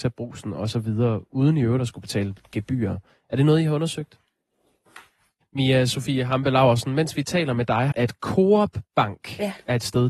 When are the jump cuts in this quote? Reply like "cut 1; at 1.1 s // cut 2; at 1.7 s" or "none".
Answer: cut 1; at 5.4 s // cut 2; at 7.9 s